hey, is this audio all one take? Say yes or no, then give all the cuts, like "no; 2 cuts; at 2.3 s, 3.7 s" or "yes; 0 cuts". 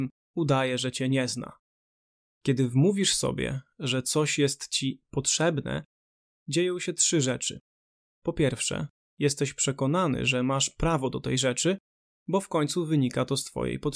yes; 0 cuts